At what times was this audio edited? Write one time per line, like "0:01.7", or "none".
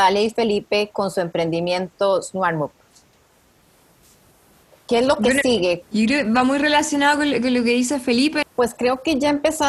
0:05.8
0:08.4